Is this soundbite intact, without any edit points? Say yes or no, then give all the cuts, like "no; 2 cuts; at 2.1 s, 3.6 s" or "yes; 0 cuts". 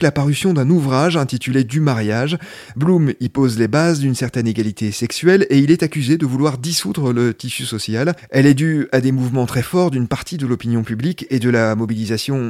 no; 1 cut; at 8.2 s